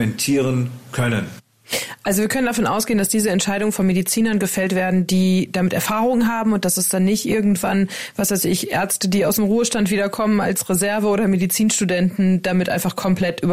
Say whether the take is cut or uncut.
uncut